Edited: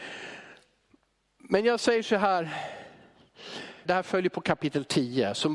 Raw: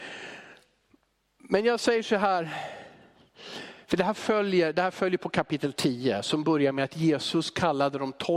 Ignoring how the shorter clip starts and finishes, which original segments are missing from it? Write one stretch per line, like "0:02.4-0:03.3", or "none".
0:03.9-0:04.7